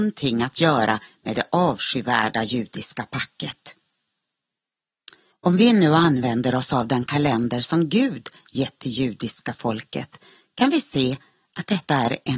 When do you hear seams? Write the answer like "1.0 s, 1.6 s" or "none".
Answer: 5.3 s

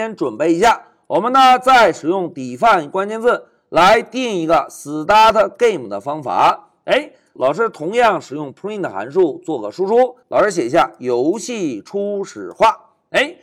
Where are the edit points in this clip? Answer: 7.4 s, 10.2 s

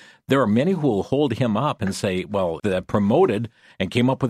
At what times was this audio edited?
2.6 s

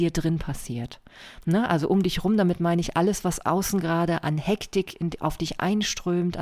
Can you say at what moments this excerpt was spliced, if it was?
none

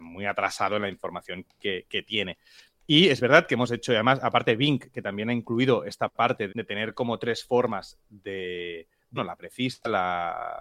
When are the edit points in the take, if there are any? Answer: 6.5 s, 9.2 s

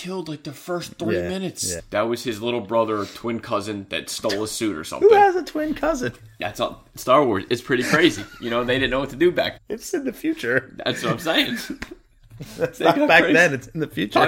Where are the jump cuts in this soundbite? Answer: 1.8 s, 9.6 s

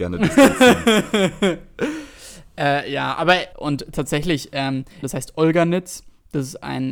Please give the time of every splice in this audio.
3.5 s, 5.0 s

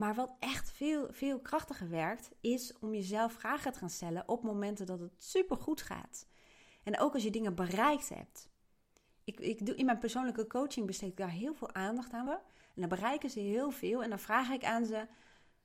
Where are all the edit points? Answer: 12.3 s

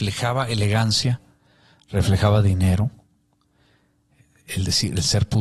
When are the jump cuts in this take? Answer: none

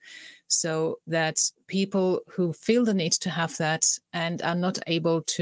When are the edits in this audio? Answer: none

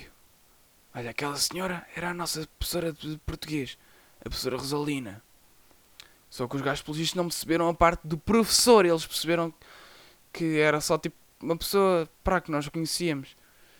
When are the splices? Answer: 6.2 s, 12.1 s

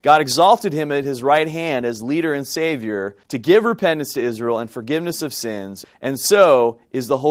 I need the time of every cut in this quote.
3.2 s, 5.8 s

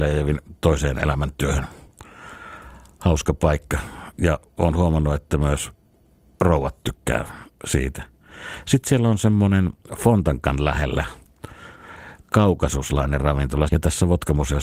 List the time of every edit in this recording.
13.7 s

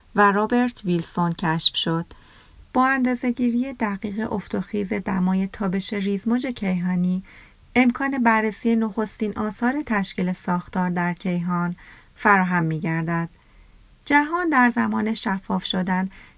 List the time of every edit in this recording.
2.6 s

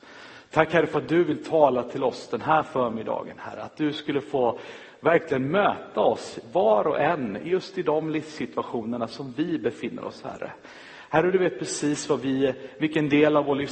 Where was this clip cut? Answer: 3.6 s

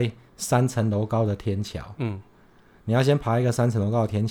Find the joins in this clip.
none

